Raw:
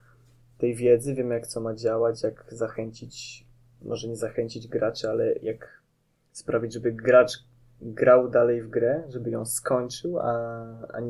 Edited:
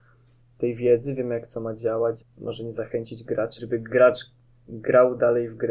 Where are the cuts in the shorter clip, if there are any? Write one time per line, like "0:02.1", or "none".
0:02.2
0:03.6